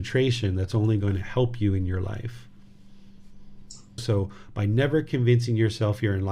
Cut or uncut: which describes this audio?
cut